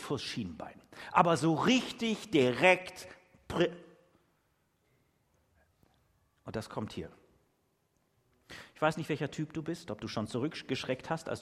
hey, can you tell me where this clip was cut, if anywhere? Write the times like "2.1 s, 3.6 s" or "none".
none